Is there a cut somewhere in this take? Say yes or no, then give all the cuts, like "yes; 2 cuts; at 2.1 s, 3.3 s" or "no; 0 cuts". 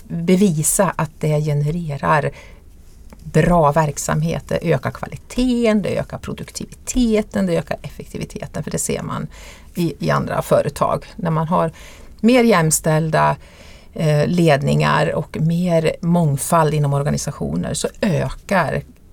no; 0 cuts